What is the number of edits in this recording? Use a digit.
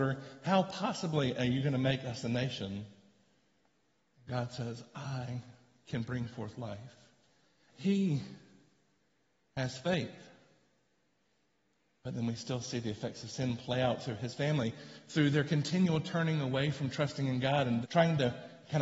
2